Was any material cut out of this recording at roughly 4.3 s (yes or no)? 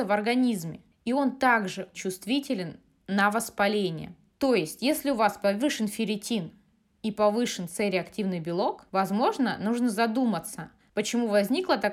yes